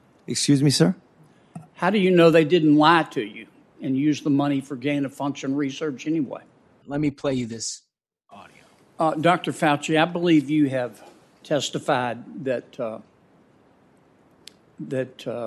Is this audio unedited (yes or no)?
no